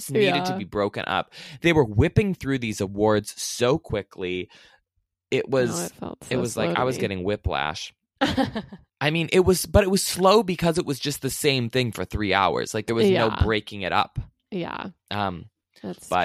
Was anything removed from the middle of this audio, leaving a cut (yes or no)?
no